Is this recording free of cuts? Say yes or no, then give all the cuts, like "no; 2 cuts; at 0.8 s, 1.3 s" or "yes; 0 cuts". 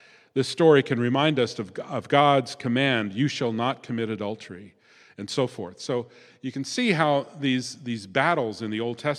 yes; 0 cuts